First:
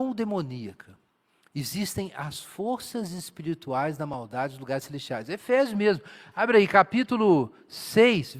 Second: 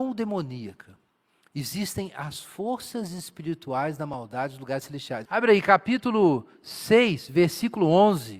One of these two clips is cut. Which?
second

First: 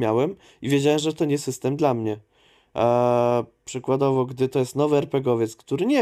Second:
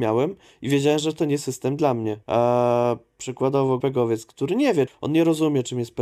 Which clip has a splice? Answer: second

